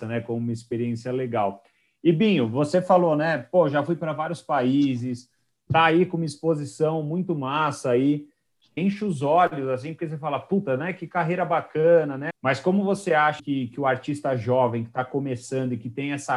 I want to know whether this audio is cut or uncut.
cut